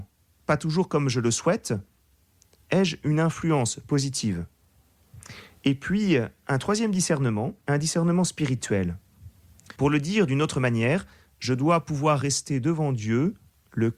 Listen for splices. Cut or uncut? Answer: cut